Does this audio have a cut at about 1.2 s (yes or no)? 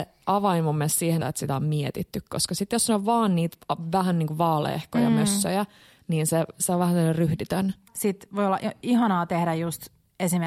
yes